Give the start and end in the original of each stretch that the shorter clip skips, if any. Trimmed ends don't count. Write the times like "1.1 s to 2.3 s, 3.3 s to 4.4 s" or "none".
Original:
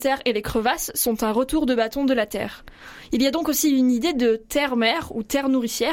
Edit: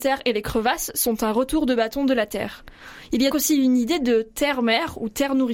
3.3 s to 3.5 s